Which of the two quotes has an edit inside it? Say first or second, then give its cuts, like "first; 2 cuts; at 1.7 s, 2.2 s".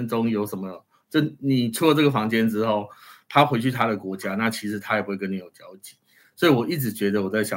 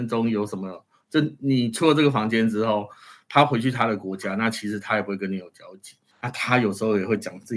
second; 1 cut; at 6.1 s